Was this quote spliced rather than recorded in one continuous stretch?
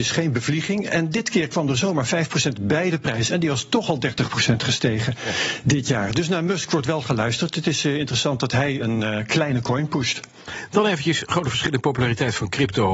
yes; 1 cut; at 8.8 s

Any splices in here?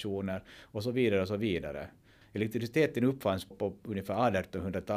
yes; 2 cuts; at 2.2 s, 3.5 s

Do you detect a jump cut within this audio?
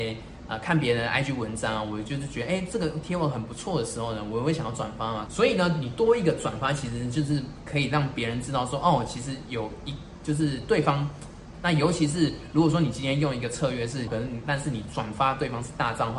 yes; 3 cuts; at 5.3 s, 11.5 s, 14.1 s

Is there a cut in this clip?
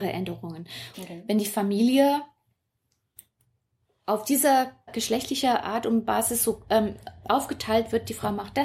yes; 2 cuts; at 0.9 s, 4.9 s

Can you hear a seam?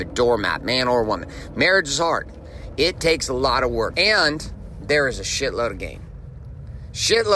yes; 1 cut; at 3.9 s

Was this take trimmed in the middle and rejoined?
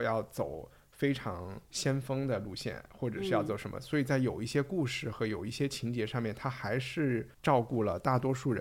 yes; 1 cut; at 7.3 s

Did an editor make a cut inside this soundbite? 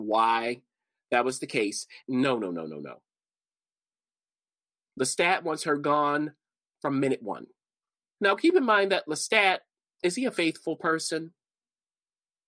yes; 2 cuts; at 2.0 s, 8.2 s

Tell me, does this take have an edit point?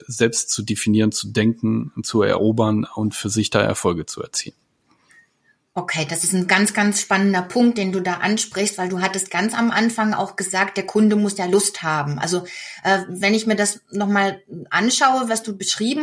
no; 0 cuts

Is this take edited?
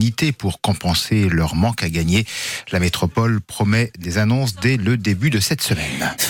no; 0 cuts

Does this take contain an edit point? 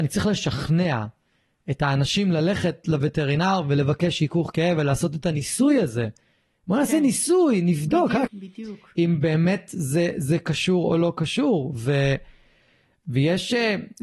yes; 1 cut; at 8.3 s

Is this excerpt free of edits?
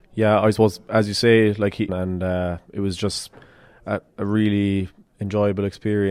no; 1 cut; at 1.9 s

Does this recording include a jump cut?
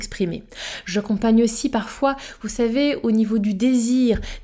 no; 0 cuts

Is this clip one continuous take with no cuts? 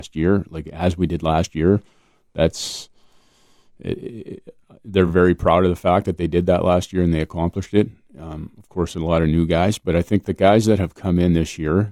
yes; 0 cuts

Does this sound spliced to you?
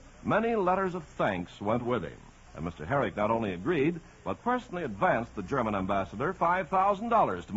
yes; 1 cut; at 2.4 s

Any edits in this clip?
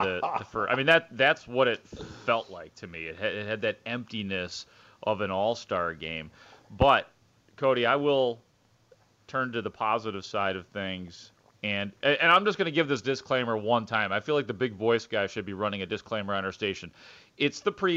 no; 0 cuts

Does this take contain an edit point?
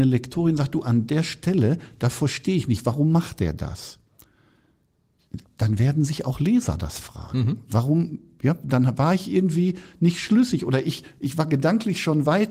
no; 0 cuts

